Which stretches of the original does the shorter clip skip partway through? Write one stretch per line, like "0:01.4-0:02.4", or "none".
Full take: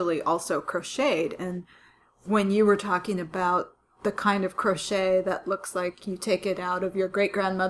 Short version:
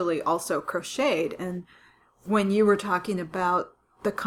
none